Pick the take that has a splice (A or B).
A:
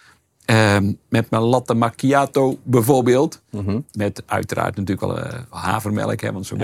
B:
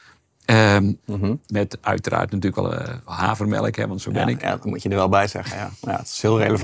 B